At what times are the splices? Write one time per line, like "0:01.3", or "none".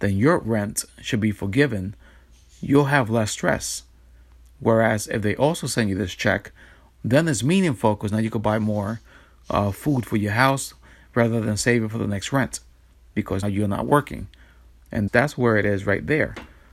0:13.4
0:15.1